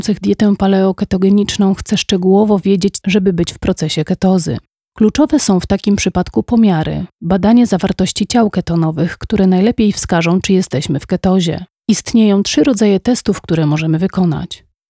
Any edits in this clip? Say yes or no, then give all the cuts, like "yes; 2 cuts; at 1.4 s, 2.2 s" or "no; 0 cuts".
yes; 1 cut; at 3.0 s